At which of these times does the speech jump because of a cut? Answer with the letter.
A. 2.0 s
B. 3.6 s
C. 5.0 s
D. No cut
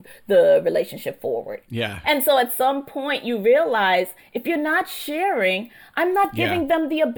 A